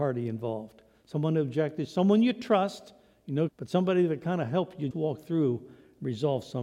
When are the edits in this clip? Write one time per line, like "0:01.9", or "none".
0:03.5
0:04.9